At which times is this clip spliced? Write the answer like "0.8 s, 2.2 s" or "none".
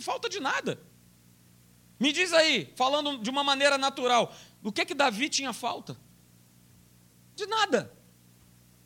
none